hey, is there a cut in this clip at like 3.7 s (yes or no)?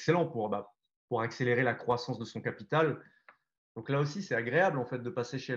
yes